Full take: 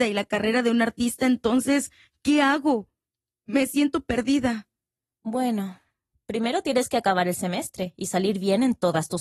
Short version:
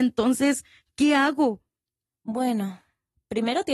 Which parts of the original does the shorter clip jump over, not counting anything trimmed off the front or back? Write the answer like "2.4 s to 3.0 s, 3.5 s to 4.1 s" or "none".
3.3 s to 5.0 s